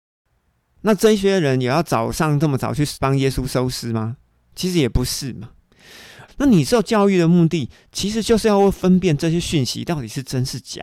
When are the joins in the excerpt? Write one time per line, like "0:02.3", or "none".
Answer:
0:06.3